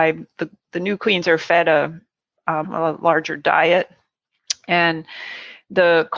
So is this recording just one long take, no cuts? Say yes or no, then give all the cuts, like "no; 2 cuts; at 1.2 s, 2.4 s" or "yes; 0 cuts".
no; 1 cut; at 2.6 s